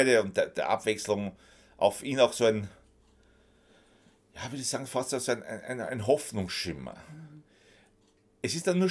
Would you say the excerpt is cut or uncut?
uncut